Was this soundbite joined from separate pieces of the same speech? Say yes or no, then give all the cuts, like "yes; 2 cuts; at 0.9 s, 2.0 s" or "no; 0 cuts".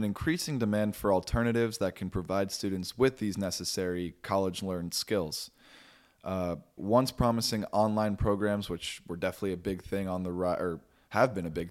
yes; 1 cut; at 6.8 s